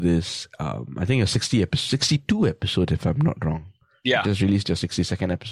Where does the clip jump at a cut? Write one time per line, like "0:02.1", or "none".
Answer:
none